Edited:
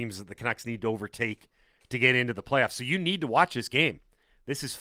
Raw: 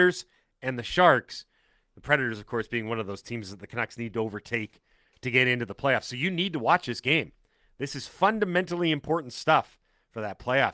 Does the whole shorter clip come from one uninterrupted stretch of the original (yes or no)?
yes